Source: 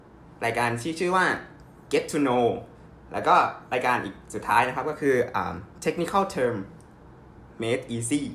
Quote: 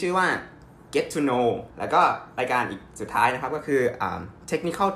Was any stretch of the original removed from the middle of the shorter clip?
yes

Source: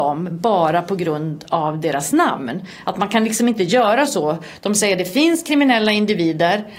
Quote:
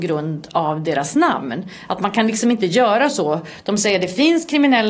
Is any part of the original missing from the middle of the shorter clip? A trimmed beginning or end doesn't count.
no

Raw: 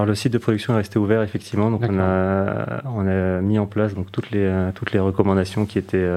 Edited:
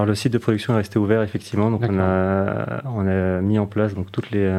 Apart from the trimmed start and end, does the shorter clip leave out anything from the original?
no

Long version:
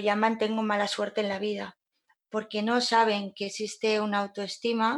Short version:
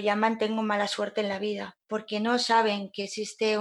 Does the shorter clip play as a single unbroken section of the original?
no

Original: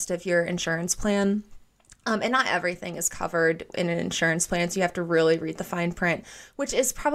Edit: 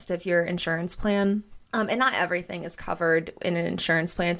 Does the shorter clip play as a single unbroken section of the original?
no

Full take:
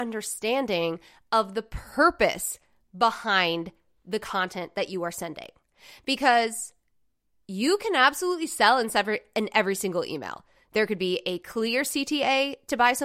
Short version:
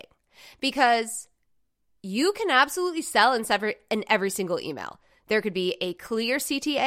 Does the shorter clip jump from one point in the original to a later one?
no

